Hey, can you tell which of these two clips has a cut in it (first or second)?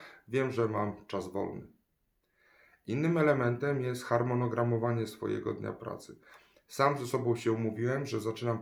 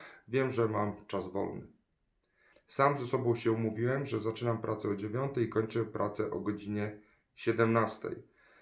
second